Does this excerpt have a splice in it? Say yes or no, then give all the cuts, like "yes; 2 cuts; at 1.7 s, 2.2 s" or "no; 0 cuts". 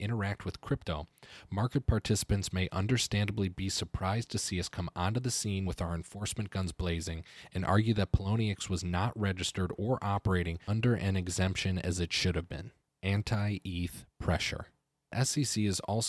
yes; 2 cuts; at 5.7 s, 12.9 s